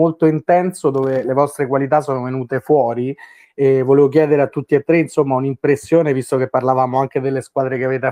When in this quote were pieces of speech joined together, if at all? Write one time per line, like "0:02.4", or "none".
none